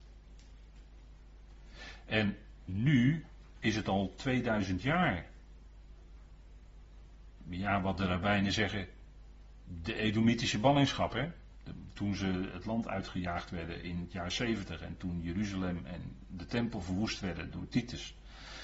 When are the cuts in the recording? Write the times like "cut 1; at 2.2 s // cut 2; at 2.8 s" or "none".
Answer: none